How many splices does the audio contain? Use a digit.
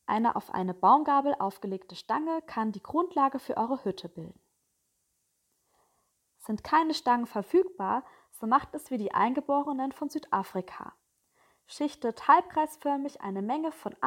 0